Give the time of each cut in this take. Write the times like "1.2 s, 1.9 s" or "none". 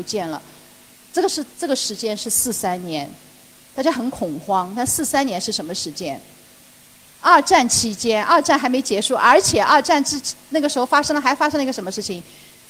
1.5 s